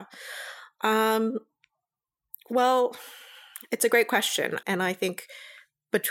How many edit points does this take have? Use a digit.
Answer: 1